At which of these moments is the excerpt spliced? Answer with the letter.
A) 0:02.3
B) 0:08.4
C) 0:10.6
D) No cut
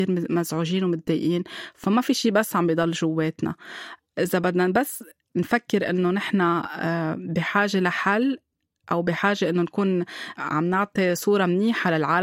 D